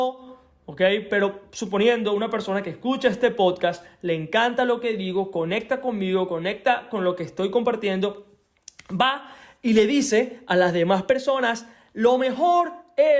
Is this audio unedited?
yes; 0 cuts

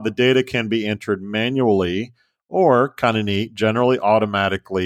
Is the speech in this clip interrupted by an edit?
no; 0 cuts

